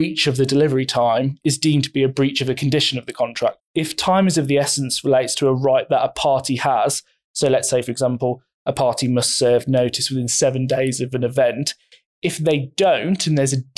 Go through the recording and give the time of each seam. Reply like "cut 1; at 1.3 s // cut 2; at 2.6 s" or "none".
cut 1; at 3.6 s

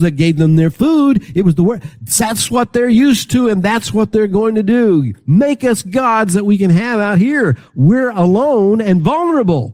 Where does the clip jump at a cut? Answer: none

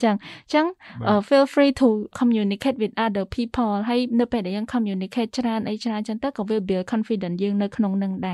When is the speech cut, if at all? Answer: cut 1; at 2.1 s

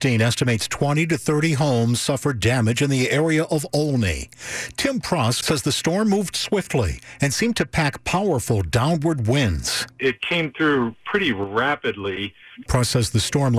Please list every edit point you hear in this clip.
cut 1; at 5.4 s // cut 2; at 12.6 s

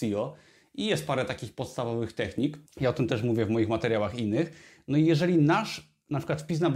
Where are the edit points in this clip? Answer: cut 1; at 2.7 s

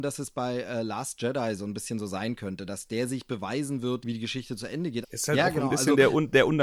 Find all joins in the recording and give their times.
cut 1; at 4.0 s // cut 2; at 5.0 s

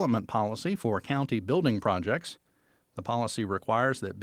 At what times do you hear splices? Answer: none

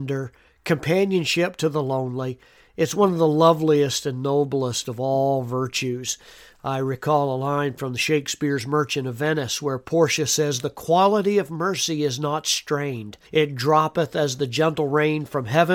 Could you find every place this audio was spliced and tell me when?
cut 1; at 13.3 s

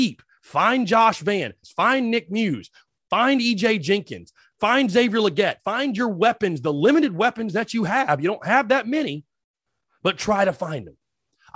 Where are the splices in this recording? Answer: cut 1; at 1.6 s

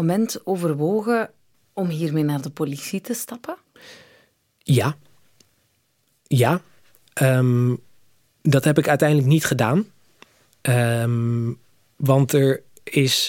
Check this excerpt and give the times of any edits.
none

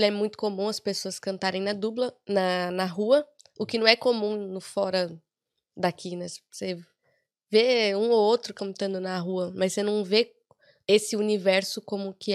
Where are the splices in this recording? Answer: none

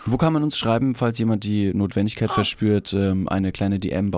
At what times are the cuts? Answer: none

